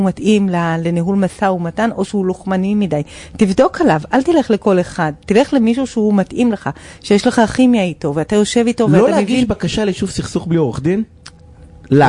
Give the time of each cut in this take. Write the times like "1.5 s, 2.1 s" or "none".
none